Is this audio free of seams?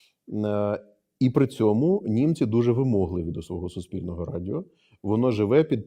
yes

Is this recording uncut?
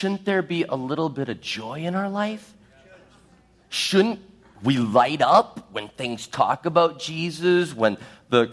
yes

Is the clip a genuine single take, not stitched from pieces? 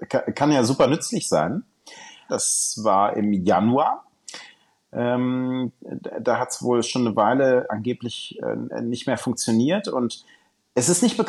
no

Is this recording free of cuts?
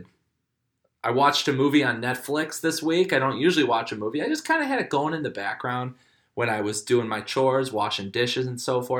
yes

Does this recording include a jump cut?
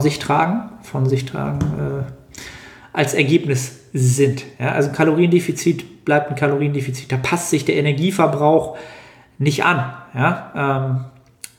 no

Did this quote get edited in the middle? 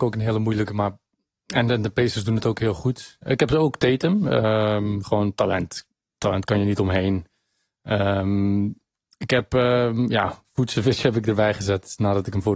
no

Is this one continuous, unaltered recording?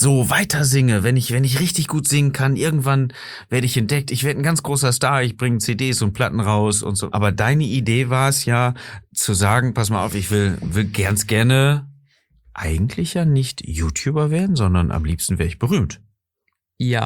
no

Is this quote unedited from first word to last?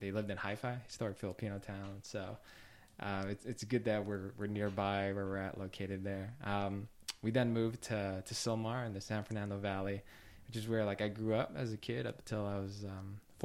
yes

